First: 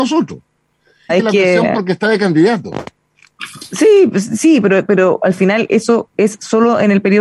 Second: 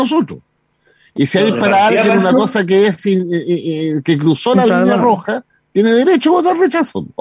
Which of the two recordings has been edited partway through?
first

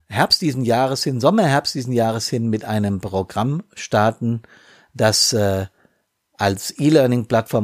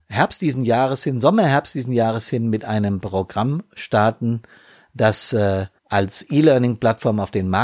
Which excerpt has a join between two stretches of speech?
second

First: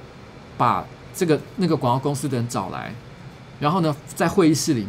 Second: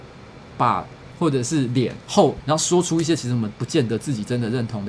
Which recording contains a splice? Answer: second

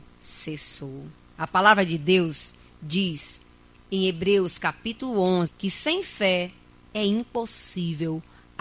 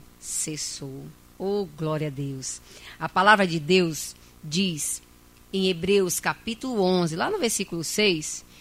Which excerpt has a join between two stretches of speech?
first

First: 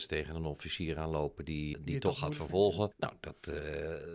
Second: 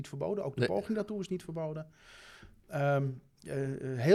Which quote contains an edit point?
first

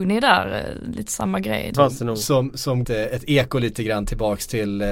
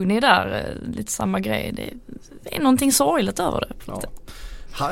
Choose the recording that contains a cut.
first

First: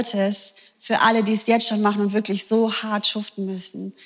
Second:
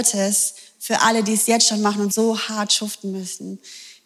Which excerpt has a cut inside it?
second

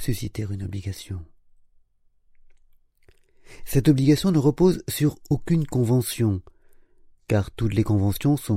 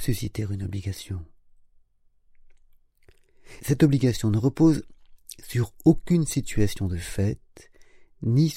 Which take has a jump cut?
second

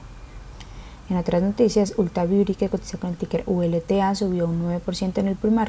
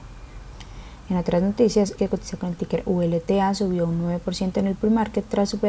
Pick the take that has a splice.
second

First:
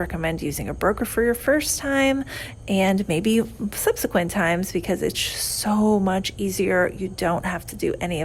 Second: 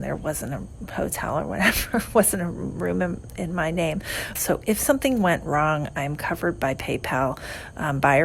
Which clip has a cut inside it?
second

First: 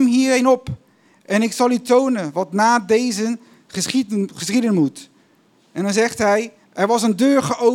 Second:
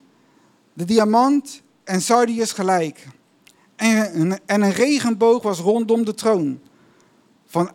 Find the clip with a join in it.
first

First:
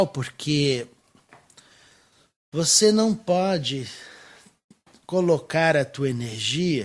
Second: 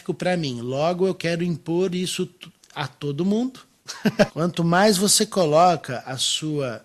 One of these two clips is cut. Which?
second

